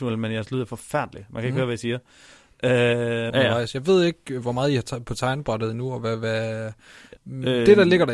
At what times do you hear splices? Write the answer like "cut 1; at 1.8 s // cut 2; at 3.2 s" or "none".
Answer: cut 1; at 3.3 s // cut 2; at 7.2 s